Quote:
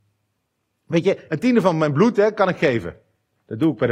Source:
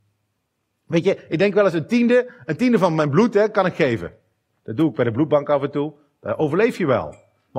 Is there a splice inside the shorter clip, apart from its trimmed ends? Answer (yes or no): yes